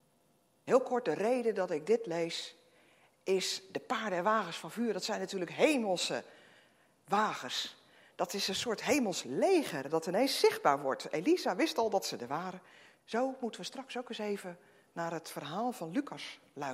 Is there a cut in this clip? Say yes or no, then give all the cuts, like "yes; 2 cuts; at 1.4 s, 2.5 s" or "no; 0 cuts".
yes; 1 cut; at 13.0 s